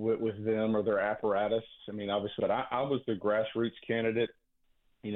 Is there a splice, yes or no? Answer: yes